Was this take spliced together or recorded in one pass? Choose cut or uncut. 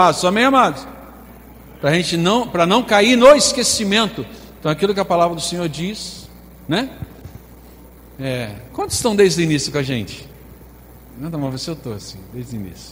uncut